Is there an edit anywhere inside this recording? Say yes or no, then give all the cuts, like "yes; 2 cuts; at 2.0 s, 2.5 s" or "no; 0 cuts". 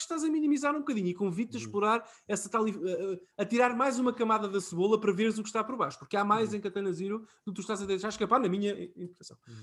no; 0 cuts